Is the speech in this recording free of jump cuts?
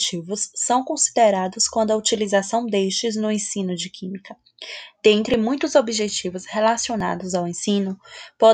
yes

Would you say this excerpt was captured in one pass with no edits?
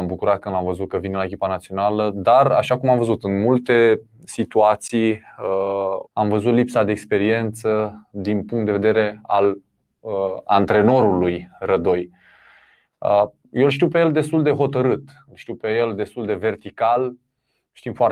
no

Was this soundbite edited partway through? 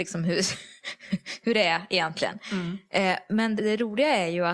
yes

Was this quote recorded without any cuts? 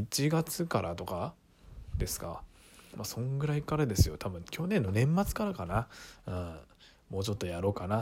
yes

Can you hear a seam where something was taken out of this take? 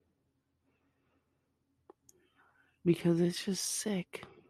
no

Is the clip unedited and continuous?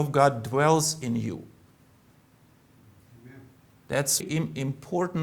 no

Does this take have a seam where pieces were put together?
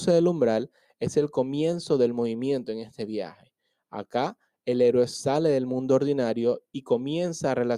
no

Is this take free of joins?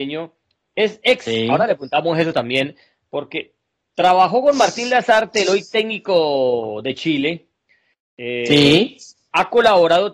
yes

